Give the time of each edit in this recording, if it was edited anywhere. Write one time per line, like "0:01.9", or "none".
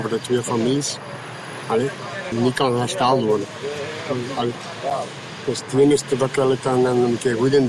0:02.3